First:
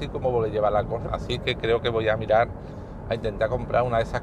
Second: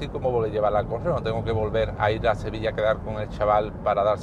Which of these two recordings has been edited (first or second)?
first